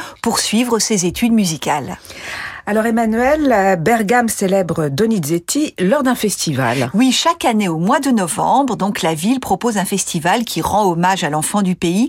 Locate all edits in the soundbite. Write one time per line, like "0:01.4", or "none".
none